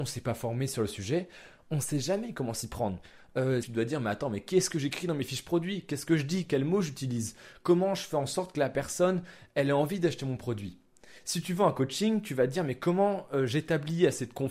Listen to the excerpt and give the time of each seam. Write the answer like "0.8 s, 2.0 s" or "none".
3.6 s